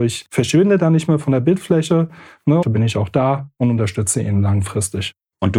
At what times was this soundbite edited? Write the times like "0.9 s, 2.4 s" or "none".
2.6 s